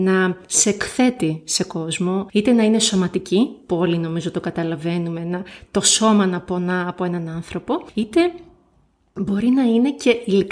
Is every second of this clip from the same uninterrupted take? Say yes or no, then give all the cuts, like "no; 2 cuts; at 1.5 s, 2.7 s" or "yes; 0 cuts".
yes; 0 cuts